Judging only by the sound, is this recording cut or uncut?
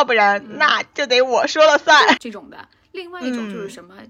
cut